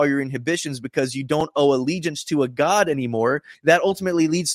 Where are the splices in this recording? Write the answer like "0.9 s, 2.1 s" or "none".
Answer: 3.5 s